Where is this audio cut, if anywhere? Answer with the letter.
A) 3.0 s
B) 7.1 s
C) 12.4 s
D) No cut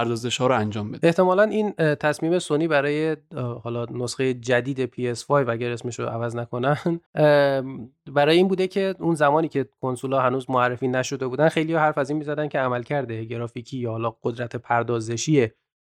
B